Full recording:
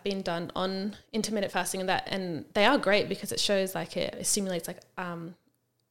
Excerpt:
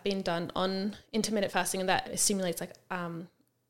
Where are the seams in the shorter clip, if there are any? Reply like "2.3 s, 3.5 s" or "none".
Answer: 2.0 s